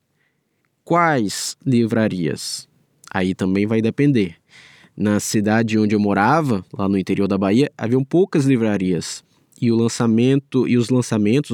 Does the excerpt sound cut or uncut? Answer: uncut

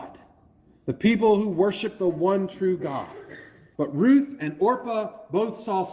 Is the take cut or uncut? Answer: cut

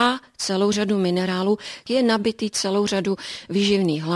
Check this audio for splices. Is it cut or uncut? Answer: cut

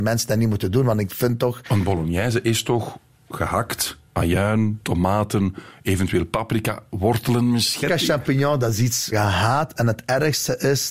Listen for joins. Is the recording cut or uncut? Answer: cut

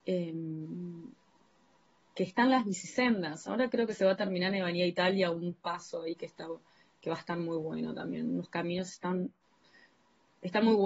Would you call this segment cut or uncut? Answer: uncut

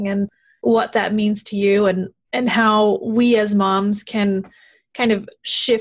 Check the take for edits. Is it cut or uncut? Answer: uncut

